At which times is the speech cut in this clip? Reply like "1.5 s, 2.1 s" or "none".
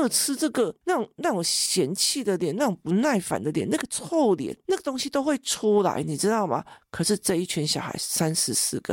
none